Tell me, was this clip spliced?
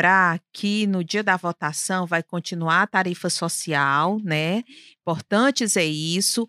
no; 0 cuts

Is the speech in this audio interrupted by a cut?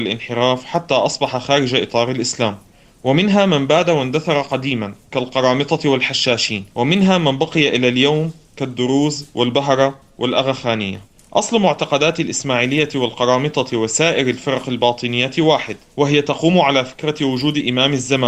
yes; 1 cut; at 6.7 s

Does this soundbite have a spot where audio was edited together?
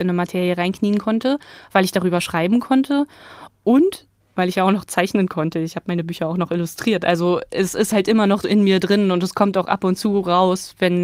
no; 0 cuts

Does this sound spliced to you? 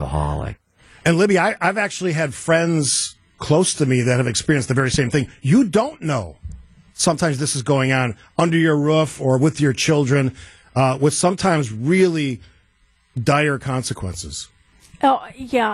no; 0 cuts

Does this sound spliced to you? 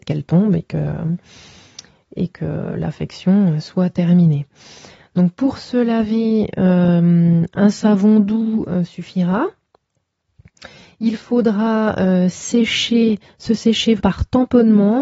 yes; 1 cut; at 14.0 s

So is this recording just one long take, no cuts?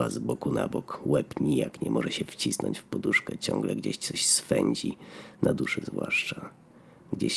yes; 0 cuts

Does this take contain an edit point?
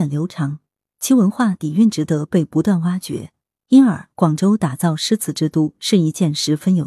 no; 0 cuts

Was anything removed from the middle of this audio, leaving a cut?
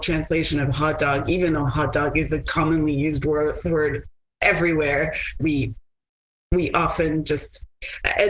yes; 1 cut; at 5.4 s

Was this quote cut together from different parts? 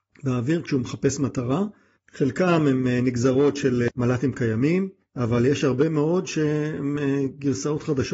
yes; 1 cut; at 2.0 s

